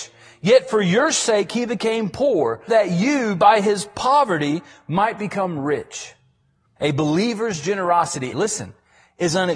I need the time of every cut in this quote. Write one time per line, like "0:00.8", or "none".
0:02.7
0:06.8
0:08.3